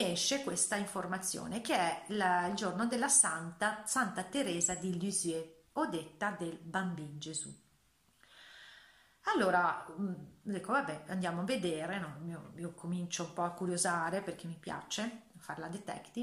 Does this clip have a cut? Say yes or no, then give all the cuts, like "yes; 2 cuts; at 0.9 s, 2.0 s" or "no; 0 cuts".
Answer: no; 0 cuts